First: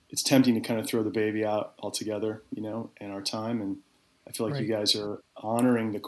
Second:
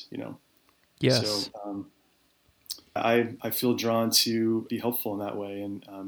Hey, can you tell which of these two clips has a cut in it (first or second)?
second